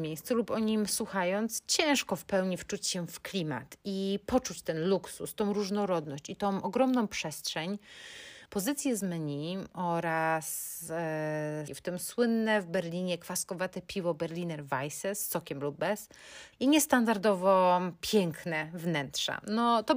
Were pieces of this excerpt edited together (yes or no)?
yes